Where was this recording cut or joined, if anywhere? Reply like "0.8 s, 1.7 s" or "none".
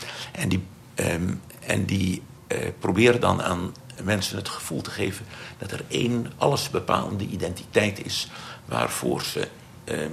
2.4 s, 4.0 s

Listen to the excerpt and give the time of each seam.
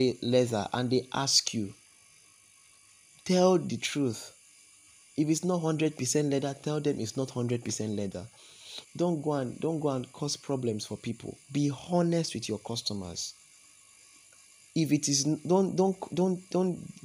8.8 s, 11.4 s

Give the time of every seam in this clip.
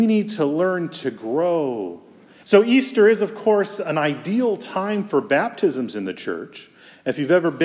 2.4 s

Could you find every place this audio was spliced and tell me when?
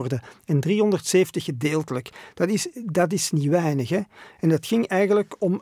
none

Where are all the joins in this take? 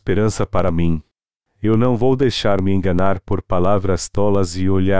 none

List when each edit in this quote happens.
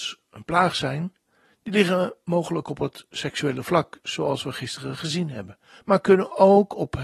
none

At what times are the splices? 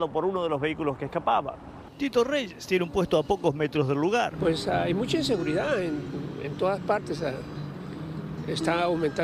none

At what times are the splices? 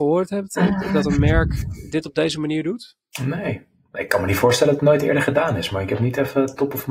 none

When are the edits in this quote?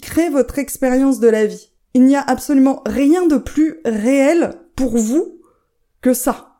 none

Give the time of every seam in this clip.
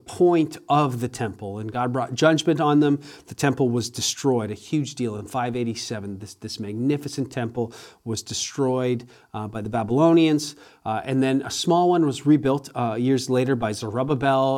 none

